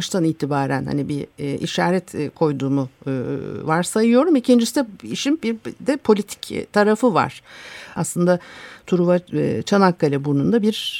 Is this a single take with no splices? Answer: no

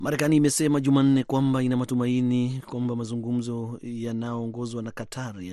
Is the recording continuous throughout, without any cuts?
yes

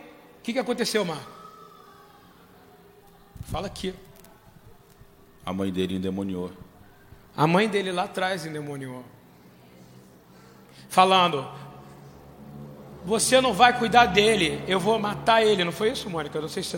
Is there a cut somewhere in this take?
no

